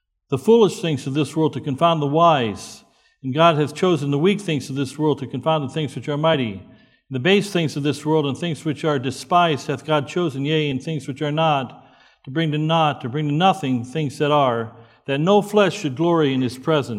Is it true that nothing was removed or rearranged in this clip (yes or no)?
yes